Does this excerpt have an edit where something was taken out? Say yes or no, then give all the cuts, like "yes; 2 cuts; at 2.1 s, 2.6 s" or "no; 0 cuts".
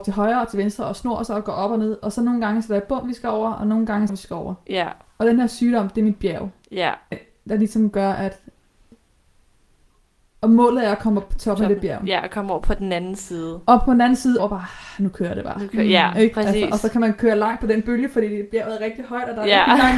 yes; 3 cuts; at 4.1 s, 7.1 s, 14.4 s